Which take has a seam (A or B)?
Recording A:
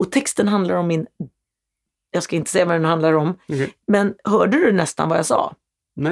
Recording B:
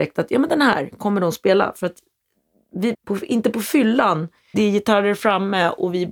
B